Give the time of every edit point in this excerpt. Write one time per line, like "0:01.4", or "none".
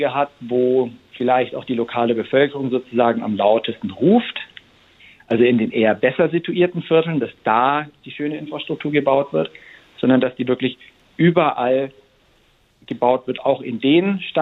0:01.0